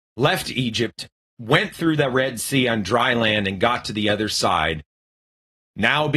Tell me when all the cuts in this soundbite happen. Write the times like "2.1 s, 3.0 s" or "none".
none